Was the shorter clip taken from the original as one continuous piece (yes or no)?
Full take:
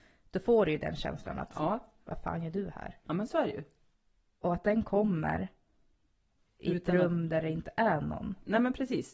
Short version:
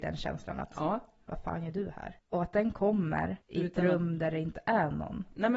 no